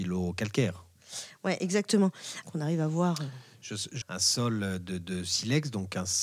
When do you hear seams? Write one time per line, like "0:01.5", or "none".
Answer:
0:02.4
0:04.0